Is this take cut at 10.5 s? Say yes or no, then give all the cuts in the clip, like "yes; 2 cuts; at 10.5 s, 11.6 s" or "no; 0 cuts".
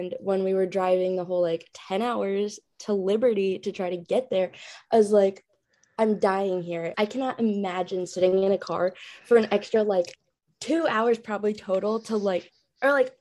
no; 1 cut; at 6.9 s